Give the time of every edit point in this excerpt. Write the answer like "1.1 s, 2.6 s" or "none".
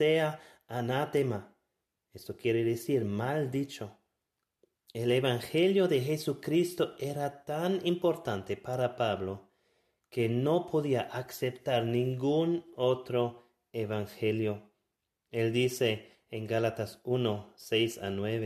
4.7 s